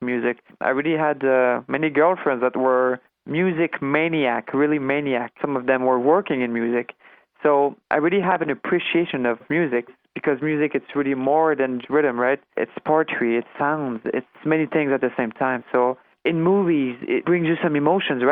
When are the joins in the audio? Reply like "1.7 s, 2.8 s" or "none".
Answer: 11.8 s